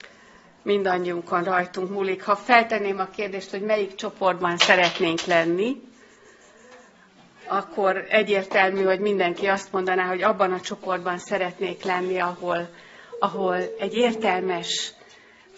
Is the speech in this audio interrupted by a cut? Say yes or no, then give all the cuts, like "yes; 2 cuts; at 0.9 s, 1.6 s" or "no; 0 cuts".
no; 0 cuts